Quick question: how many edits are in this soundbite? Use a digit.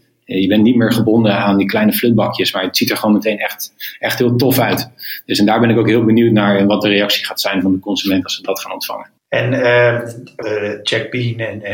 2